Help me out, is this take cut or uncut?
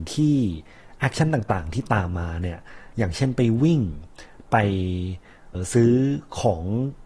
cut